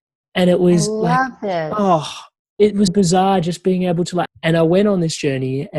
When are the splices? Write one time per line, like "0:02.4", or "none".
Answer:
0:02.9
0:04.3